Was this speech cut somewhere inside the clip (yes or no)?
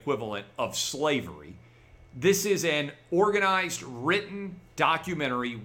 no